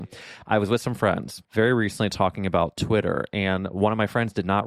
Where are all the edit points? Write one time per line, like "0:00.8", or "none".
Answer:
0:01.4

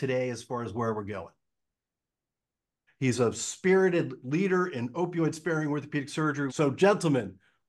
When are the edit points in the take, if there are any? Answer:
0:02.9
0:06.5

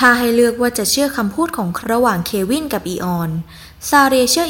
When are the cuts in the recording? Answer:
0:01.8

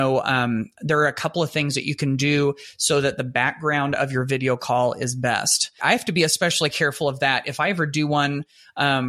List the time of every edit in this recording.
0:05.8

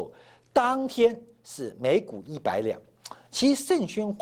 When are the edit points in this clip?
0:03.2

